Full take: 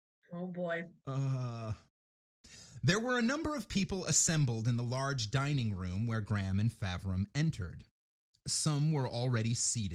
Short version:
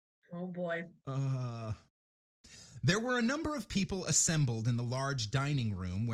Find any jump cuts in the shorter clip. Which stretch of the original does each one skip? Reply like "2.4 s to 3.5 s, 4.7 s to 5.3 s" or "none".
none